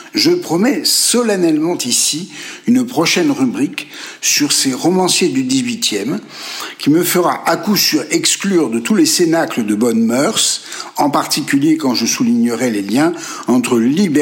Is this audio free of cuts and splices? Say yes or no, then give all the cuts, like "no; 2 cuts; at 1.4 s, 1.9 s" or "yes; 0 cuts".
yes; 0 cuts